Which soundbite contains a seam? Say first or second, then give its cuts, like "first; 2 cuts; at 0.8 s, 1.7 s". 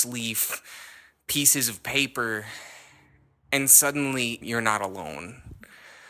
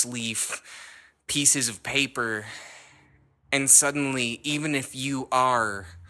first; 1 cut; at 4.4 s